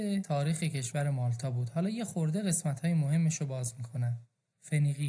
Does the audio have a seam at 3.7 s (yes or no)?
no